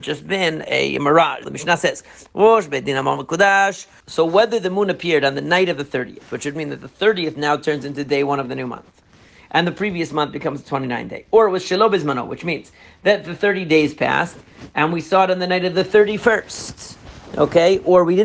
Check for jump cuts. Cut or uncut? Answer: cut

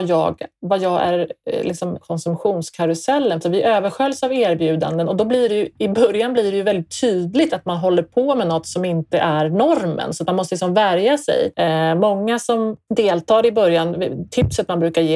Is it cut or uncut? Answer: cut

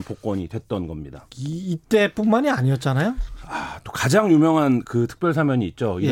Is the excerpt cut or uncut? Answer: uncut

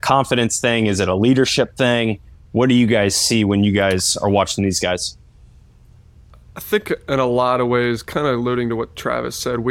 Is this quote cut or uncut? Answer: uncut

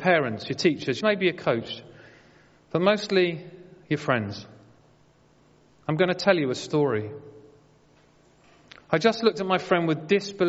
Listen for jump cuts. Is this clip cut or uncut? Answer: cut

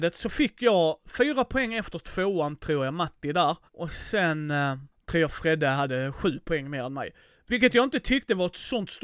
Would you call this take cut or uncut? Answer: cut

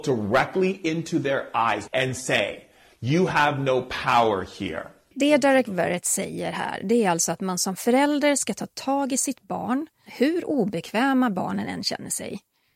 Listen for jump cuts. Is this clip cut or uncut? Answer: cut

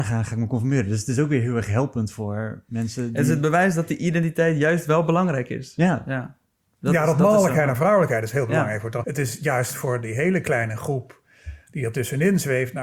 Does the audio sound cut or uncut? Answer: cut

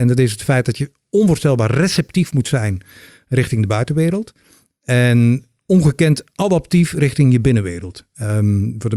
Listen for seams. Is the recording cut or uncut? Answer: uncut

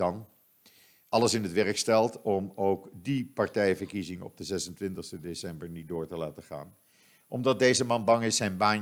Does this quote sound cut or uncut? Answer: uncut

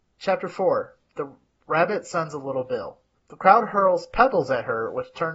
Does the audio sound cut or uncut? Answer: cut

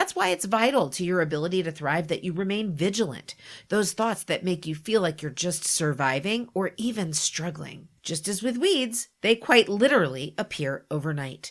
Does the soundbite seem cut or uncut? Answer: cut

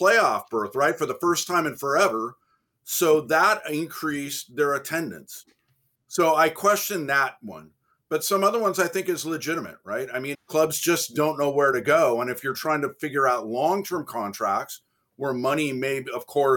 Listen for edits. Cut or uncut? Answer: cut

